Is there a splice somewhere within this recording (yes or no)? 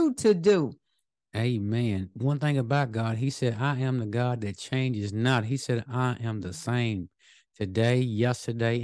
no